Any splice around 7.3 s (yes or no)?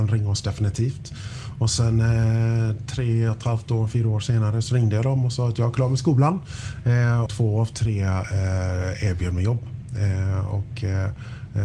yes